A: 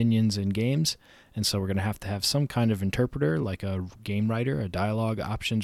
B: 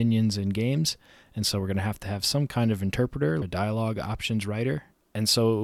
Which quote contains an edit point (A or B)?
B